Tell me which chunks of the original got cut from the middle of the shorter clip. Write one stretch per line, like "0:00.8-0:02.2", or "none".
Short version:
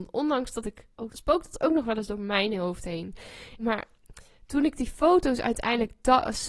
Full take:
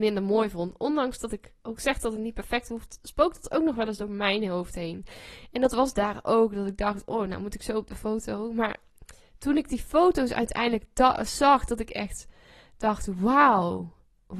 0:01.8-0:03.0
0:05.5-0:08.5